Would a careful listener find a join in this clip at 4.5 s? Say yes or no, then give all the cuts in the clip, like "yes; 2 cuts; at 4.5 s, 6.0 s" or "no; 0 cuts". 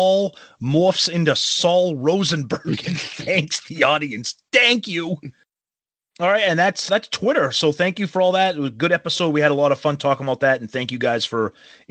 no; 1 cut; at 6.9 s